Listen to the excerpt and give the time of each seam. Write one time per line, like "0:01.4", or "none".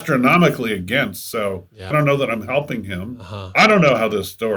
0:01.9